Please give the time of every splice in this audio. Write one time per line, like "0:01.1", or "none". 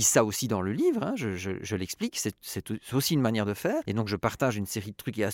none